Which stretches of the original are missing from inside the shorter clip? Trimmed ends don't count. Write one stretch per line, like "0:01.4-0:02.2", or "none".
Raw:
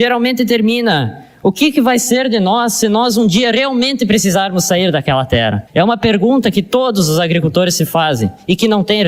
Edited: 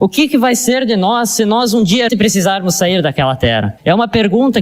0:03.5-0:04.0

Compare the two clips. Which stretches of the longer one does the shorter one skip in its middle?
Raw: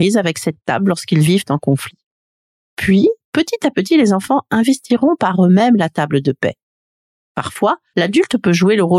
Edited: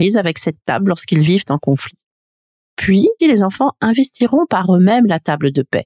0:03.2-0:03.9

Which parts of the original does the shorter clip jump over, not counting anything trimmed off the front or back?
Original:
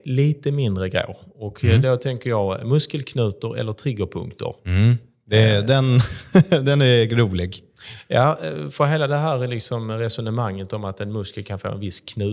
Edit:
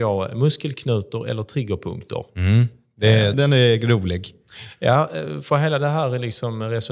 0:05.6-0:06.6

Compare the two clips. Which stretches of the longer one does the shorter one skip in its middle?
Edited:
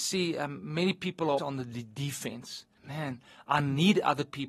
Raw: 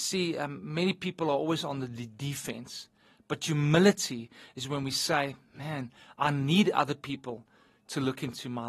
0:01.4-0:01.6
0:03.0-0:05.5

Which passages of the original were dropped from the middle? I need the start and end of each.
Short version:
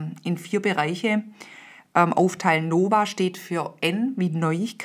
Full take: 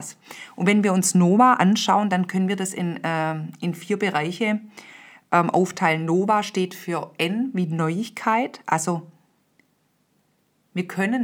none

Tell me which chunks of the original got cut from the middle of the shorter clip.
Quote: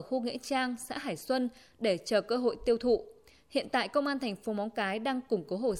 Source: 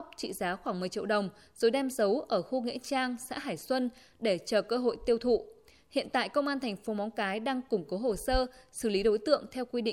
none

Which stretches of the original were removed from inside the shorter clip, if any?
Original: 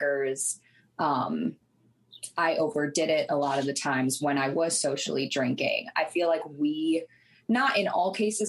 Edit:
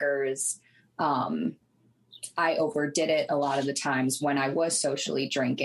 none

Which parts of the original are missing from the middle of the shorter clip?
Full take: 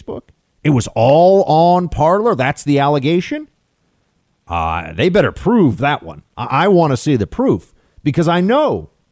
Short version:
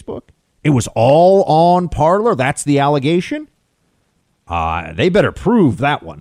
none

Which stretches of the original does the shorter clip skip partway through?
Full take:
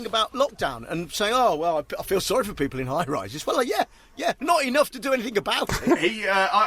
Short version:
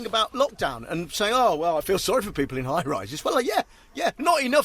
0:01.8-0:02.0

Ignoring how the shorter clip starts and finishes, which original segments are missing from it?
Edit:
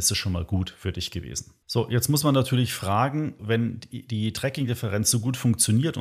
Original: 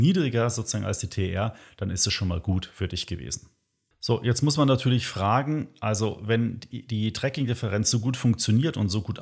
0:03.6-0:03.9
0:05.7-0:06.2

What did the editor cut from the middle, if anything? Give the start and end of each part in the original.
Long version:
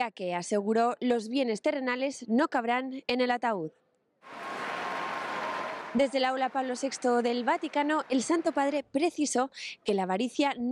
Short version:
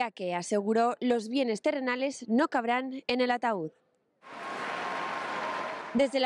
none

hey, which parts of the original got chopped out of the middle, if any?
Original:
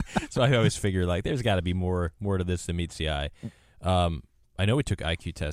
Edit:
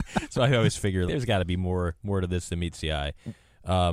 0:01.1-0:01.2

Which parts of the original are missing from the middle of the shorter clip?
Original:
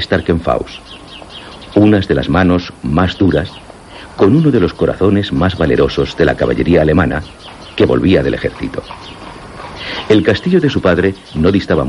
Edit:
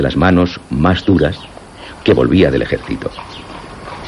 0:04.1-0:07.7

